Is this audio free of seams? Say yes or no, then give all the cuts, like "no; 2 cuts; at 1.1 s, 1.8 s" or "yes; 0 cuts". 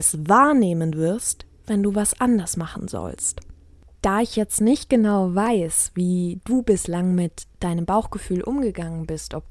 yes; 0 cuts